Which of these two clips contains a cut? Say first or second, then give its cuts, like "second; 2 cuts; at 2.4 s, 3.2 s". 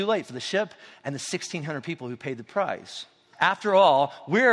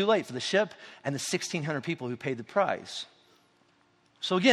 first; 1 cut; at 3.3 s